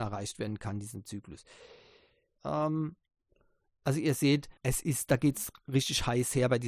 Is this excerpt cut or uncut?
cut